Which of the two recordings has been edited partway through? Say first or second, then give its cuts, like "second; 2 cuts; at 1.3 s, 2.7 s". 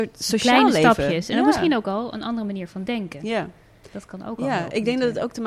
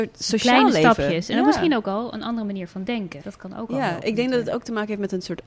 second; 1 cut; at 3.2 s